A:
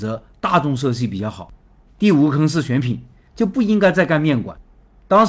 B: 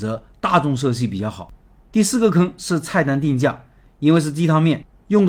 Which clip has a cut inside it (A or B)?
A